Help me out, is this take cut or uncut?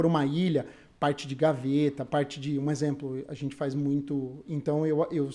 cut